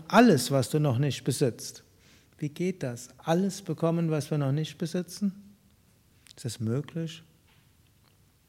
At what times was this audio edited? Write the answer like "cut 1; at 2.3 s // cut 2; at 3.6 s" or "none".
none